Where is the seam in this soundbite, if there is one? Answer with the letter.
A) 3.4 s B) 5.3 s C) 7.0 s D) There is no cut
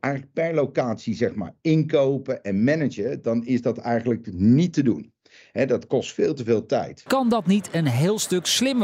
D